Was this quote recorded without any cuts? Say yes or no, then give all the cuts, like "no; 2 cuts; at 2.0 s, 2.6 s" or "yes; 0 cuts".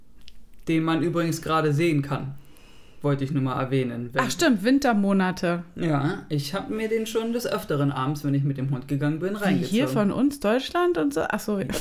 yes; 0 cuts